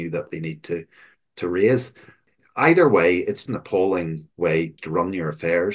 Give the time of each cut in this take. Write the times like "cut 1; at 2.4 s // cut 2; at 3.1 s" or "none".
cut 1; at 3.5 s